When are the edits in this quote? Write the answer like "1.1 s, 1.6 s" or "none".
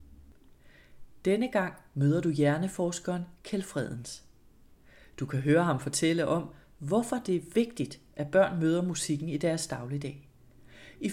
none

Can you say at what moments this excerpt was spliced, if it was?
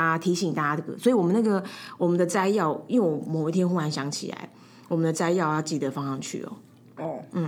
none

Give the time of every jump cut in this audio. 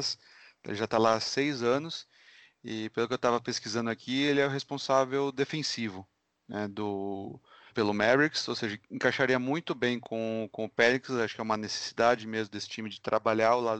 7.7 s

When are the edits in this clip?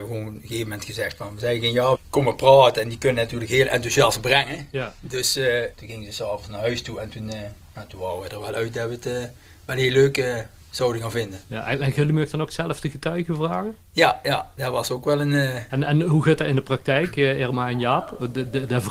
2.0 s, 5.7 s, 15.7 s

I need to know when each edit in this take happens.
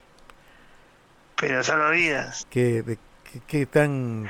1.2 s, 2.4 s

